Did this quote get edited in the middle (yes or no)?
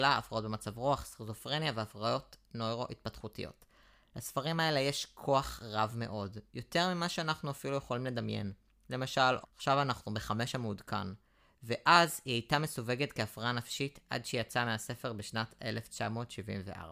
yes